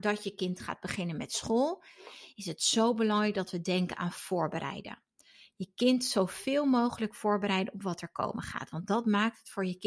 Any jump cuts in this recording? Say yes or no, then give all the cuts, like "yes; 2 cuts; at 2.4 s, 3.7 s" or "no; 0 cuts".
no; 0 cuts